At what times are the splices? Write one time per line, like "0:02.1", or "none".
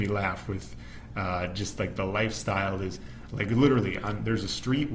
0:03.3